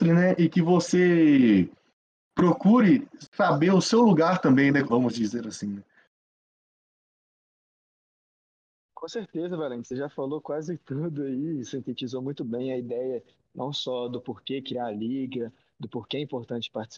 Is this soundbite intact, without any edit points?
no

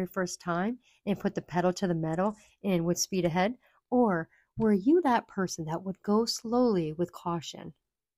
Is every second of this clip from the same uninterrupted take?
yes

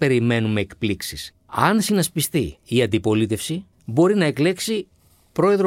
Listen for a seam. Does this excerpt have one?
yes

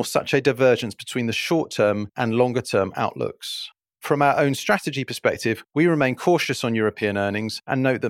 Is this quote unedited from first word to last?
yes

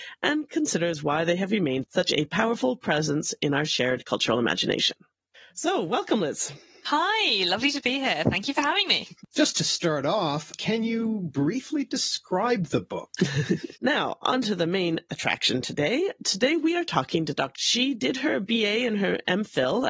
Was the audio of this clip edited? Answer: yes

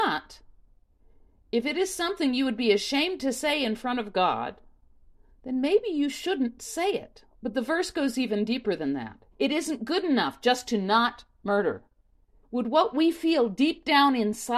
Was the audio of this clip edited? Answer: yes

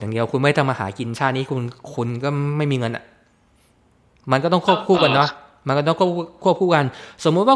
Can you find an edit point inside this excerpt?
no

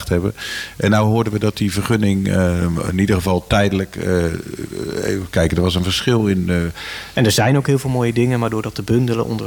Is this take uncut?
no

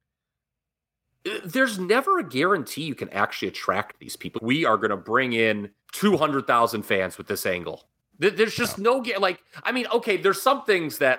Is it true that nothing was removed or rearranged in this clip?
no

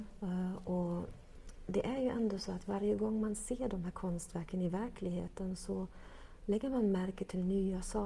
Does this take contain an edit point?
no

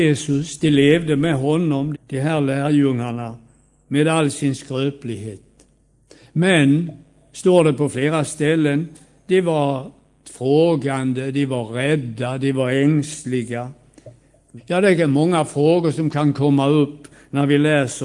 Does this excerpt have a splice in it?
yes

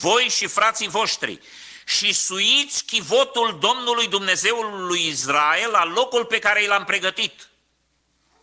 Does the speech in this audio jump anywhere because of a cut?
no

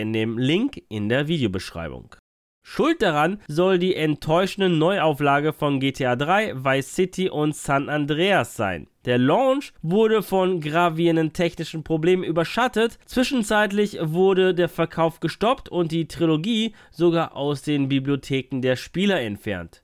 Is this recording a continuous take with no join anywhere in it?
no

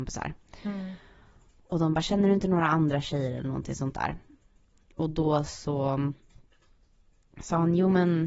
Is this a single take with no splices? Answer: yes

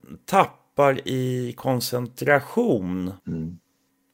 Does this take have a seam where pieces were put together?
yes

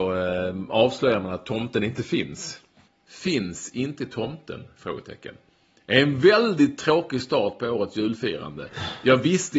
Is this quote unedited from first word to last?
no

